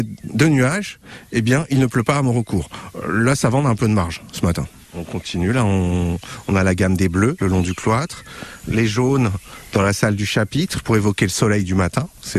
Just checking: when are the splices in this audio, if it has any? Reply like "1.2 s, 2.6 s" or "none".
7.4 s